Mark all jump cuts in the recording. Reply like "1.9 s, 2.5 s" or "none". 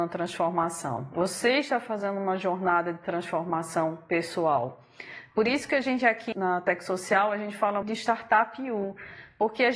6.3 s, 7.8 s